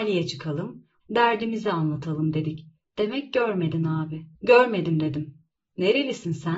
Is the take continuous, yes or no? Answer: no